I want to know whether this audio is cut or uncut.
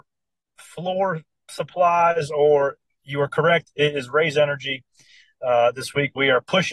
uncut